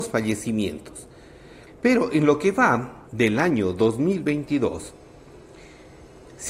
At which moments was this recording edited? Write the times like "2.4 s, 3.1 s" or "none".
1.7 s, 3.1 s